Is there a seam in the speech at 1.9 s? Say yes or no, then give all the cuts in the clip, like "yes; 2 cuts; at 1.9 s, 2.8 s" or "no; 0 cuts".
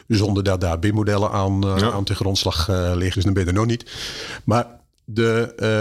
no; 1 cut; at 3.1 s